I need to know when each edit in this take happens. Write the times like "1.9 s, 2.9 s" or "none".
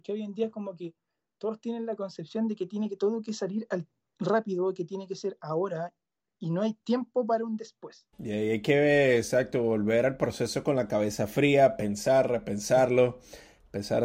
8.1 s

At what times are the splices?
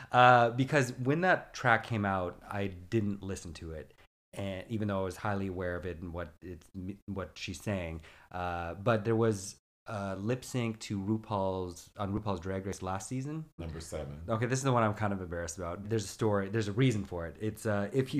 13.6 s, 15.8 s

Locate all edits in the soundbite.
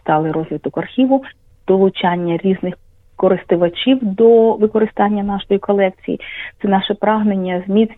1.5 s

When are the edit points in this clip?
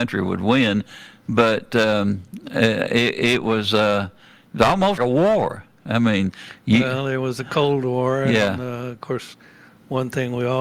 5.0 s

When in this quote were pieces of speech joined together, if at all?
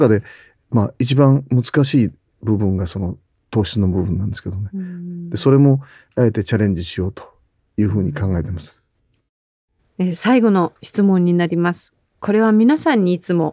none

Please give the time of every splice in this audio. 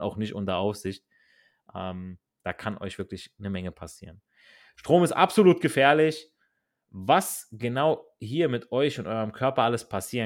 none

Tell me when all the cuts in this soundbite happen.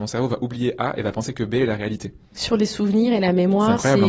2.3 s

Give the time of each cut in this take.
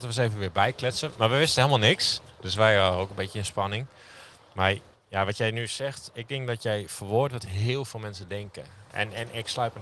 none

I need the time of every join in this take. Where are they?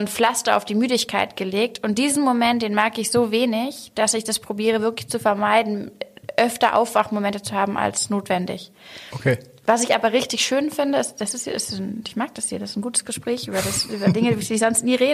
none

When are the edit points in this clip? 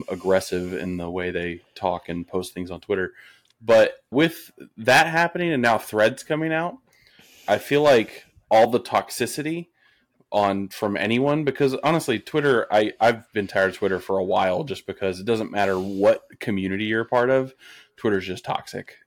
4.1 s

